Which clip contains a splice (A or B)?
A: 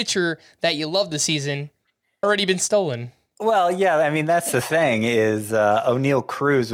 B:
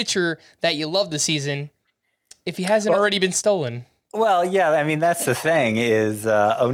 A